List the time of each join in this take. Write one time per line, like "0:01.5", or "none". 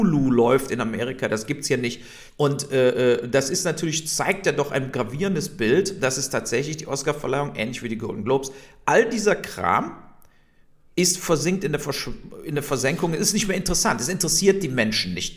0:02.3